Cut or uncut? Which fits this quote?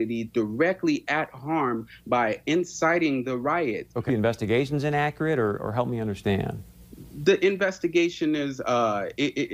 cut